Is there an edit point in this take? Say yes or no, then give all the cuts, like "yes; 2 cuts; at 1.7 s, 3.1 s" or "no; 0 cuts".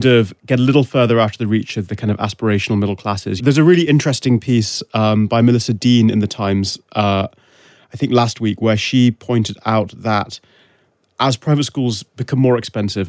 yes; 1 cut; at 3.4 s